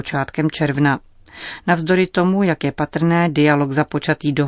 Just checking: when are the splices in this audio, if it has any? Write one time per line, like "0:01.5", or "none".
none